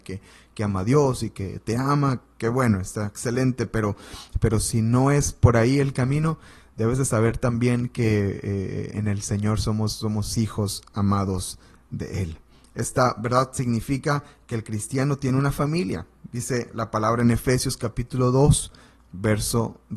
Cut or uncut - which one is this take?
cut